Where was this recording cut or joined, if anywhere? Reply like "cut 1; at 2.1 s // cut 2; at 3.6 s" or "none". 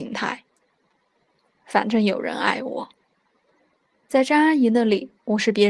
cut 1; at 1.6 s